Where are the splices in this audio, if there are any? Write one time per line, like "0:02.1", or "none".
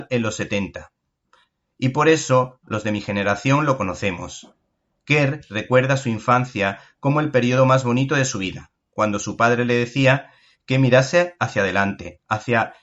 none